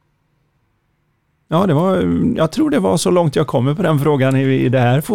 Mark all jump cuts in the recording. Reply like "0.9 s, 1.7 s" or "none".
none